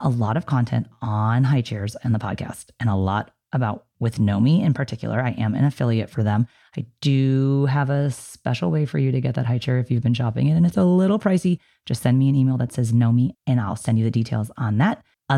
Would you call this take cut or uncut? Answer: cut